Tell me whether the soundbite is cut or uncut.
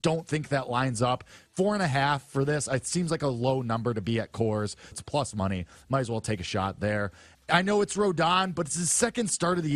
cut